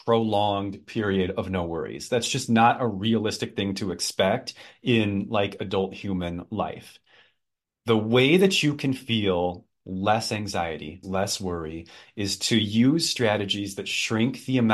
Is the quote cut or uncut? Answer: cut